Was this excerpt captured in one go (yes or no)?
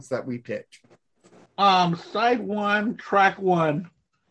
no